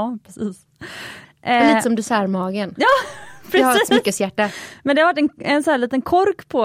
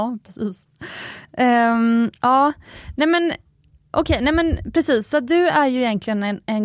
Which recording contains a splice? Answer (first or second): first